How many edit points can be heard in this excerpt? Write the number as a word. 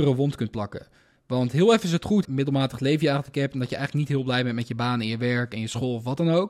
one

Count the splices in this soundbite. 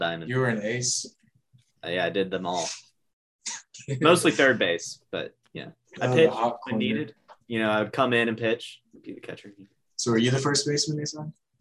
one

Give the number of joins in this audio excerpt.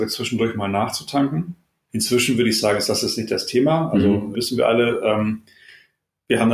two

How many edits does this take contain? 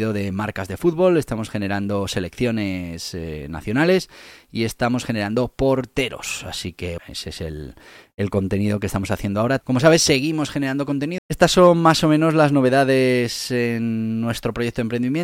three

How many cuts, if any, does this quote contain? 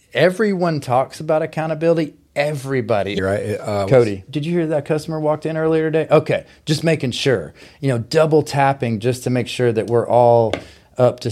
two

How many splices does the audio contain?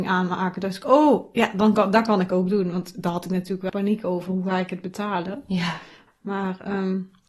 two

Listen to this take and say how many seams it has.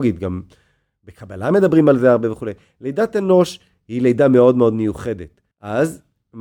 one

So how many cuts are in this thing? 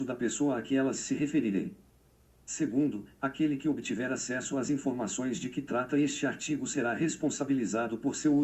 zero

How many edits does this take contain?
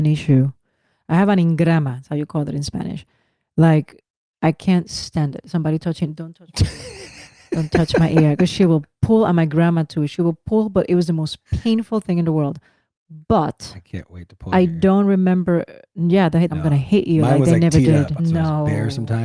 two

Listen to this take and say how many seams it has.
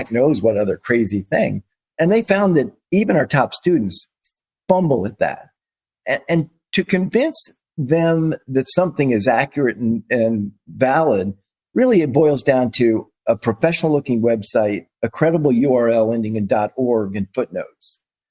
one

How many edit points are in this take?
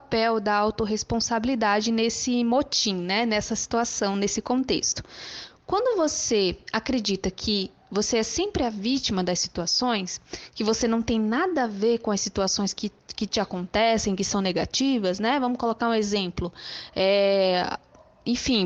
zero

